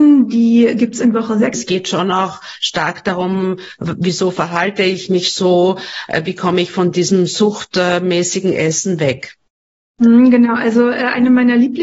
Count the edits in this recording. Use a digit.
1